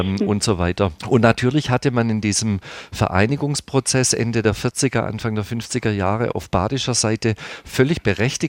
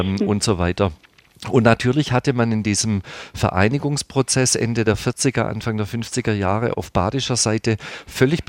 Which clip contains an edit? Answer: first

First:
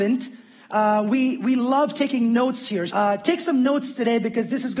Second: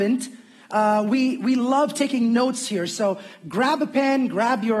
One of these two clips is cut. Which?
first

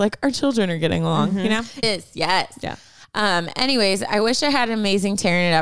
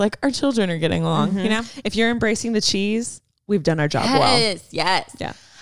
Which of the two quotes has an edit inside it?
first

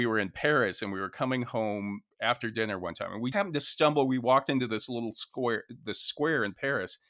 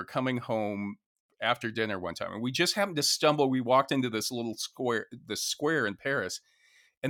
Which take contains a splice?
first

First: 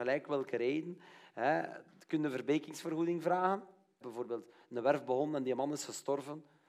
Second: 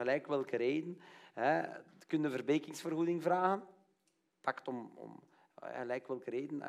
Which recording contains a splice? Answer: first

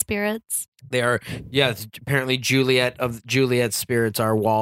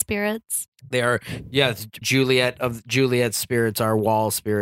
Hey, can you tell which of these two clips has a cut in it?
second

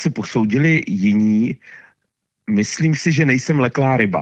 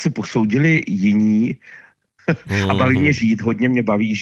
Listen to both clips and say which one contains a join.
second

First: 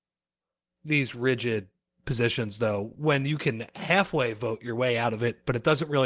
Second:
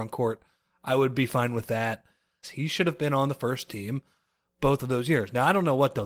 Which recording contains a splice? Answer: second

